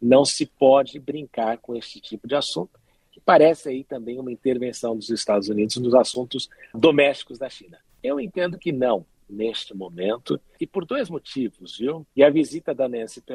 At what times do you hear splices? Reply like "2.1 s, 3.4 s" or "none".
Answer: 6.7 s, 7.9 s, 12.1 s